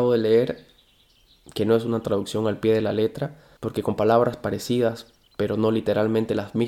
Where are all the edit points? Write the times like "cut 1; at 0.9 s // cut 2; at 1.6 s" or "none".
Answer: cut 1; at 3.6 s